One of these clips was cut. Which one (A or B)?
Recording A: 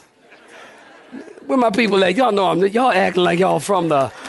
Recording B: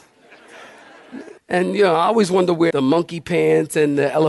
B